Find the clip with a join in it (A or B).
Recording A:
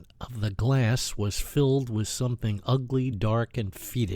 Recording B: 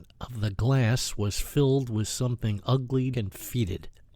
B